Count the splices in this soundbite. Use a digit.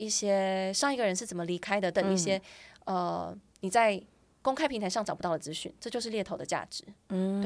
1